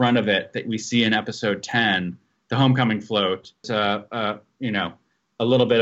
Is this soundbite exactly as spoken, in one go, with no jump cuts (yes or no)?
no